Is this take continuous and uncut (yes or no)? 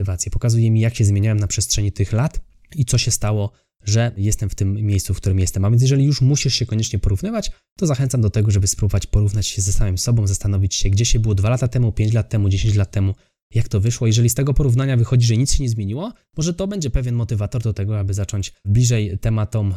yes